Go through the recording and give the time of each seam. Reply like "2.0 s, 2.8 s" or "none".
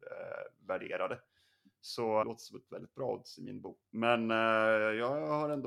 2.2 s, 3.8 s